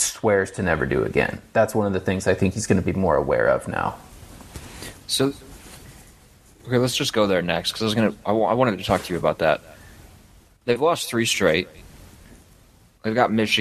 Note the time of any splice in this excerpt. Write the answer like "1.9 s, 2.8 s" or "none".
none